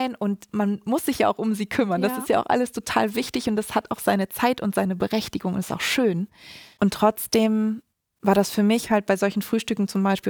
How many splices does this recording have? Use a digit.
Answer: 0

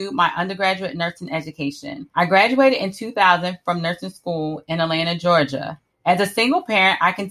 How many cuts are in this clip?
1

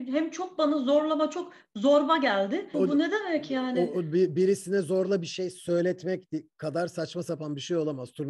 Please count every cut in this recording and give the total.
1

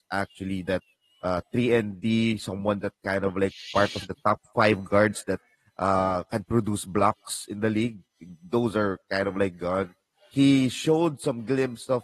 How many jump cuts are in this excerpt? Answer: 0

